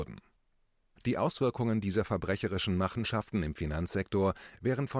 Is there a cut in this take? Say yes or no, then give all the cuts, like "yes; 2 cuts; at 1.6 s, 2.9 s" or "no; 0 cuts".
no; 0 cuts